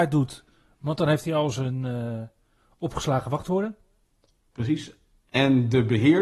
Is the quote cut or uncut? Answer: uncut